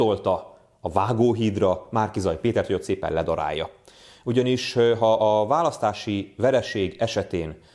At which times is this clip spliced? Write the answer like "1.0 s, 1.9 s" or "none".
none